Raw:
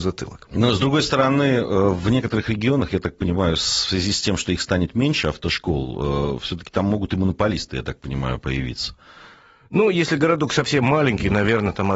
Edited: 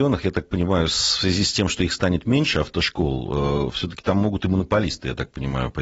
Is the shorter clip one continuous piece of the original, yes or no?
yes